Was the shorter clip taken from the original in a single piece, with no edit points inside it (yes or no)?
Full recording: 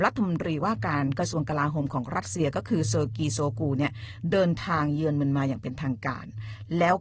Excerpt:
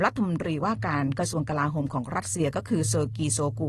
yes